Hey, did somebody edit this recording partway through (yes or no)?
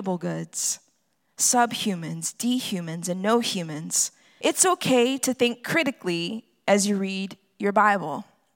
yes